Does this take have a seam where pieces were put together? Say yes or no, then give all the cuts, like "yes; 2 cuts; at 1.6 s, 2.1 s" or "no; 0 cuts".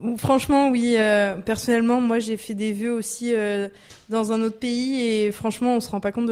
no; 0 cuts